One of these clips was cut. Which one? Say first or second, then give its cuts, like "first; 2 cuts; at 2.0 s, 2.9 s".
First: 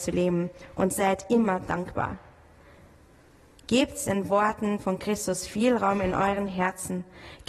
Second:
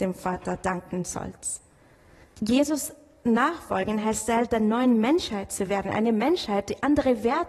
second; 1 cut; at 2.2 s